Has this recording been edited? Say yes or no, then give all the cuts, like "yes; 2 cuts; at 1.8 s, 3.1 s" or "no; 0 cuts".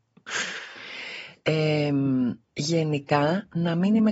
yes; 1 cut; at 2.4 s